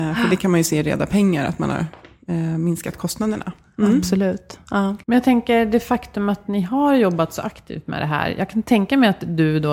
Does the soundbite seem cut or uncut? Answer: cut